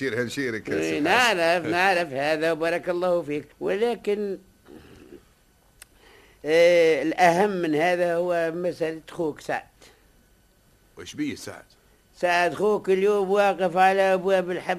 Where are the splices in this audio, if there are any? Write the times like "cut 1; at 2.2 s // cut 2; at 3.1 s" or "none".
cut 1; at 3.5 s